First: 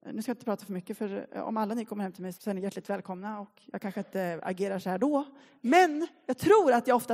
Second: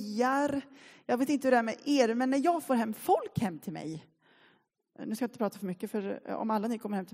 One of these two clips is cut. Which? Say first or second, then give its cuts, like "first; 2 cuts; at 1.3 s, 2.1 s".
first; 1 cut; at 2.3 s